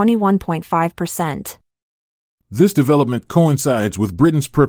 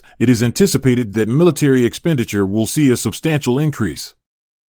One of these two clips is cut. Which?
first; 1 cut; at 2.4 s

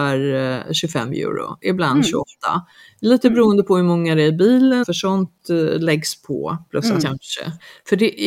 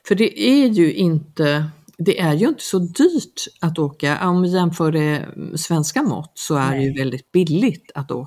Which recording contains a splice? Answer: first; 2 cuts; at 4.8 s, 7.0 s

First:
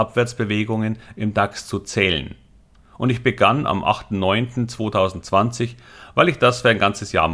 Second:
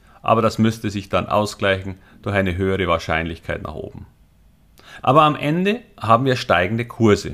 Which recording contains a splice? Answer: second; 1 cut; at 5.0 s

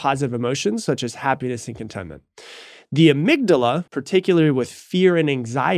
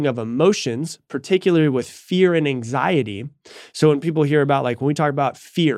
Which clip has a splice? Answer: first; 1 cut; at 3.9 s

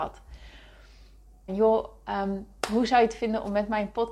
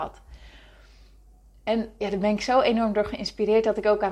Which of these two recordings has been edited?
first; 1 cut; at 1.5 s

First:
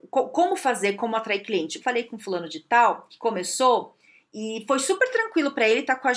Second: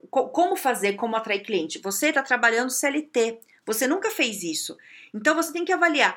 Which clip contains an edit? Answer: first; 1 cut; at 1.8 s

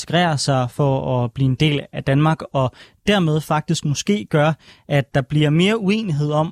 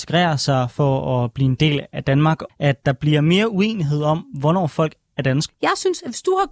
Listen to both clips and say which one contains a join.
second; 2 cuts; at 2.5 s, 5.5 s

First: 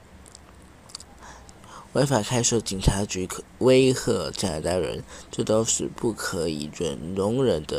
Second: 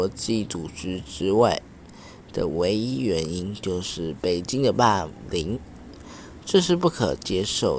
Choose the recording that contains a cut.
first; 1 cut; at 1.6 s

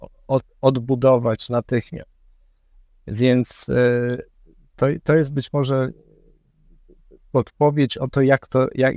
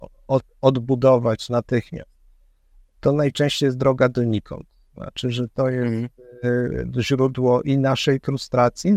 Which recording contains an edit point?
first; 1 cut; at 2.9 s

